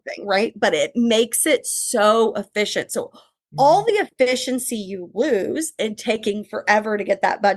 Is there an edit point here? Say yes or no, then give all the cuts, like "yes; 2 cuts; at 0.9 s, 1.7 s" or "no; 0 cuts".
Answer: no; 0 cuts